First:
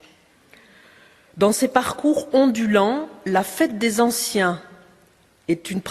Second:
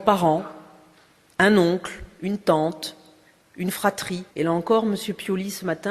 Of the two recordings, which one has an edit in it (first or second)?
second